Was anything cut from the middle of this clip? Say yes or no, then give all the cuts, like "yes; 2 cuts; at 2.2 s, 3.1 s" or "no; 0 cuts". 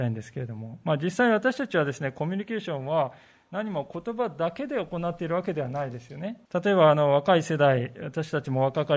yes; 1 cut; at 6.5 s